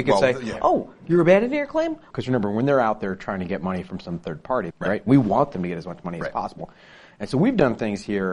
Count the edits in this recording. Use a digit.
2